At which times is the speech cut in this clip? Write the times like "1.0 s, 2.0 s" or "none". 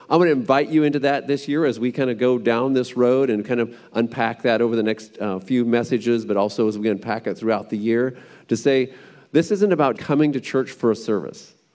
10.0 s